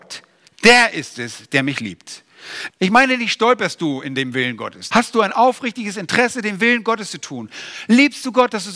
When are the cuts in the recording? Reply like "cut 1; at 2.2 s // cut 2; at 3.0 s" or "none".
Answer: cut 1; at 2.7 s // cut 2; at 4.9 s